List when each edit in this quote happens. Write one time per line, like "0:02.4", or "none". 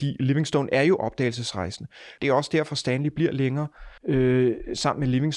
0:02.2
0:04.0